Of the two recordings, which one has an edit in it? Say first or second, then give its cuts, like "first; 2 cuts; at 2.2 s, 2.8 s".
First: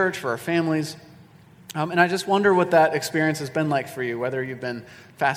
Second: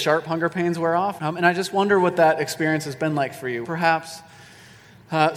second; 2 cuts; at 1.2 s, 3.6 s